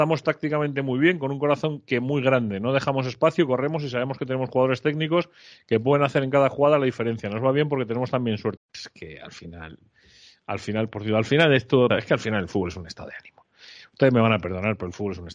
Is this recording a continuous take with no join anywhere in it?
no; 2 cuts; at 8.6 s, 11.9 s

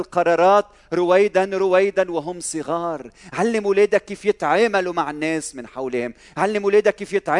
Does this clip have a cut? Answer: no; 0 cuts

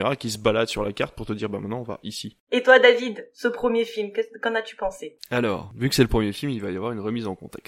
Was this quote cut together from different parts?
no; 0 cuts

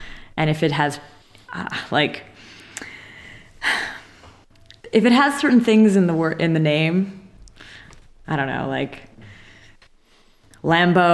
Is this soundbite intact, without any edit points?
yes; 0 cuts

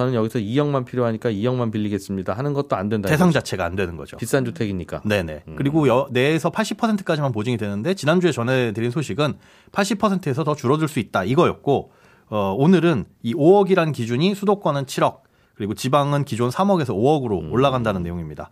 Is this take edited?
no; 0 cuts

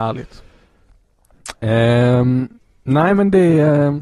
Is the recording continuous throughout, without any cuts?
yes; 0 cuts

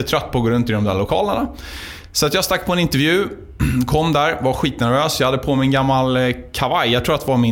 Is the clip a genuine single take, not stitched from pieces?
yes; 0 cuts

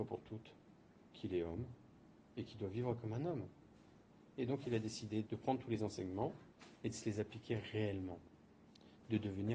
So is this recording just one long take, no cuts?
no; 1 cut; at 5.3 s

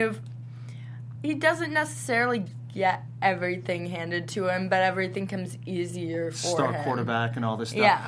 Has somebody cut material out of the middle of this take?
yes; 1 cut; at 1.1 s

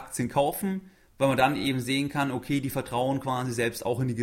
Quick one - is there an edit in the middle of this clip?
no; 0 cuts

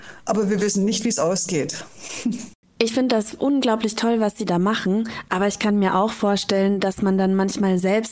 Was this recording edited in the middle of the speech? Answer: yes; 1 cut; at 2.6 s

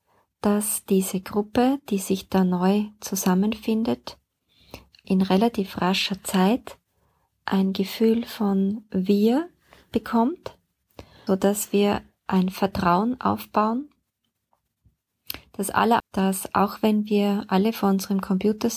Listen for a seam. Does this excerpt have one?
yes; 3 cuts; at 5.0 s, 11.3 s, 16.0 s

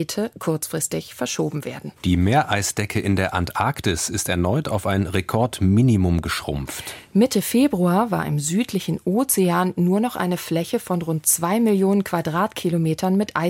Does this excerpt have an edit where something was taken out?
yes; 1 cut; at 2.0 s

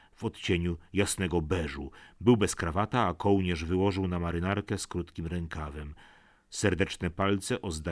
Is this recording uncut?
yes; 0 cuts

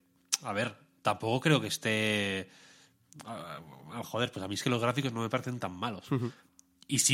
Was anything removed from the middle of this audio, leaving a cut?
yes; 1 cut; at 4.0 s

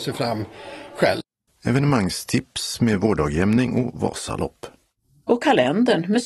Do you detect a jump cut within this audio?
yes; 1 cut; at 1.5 s

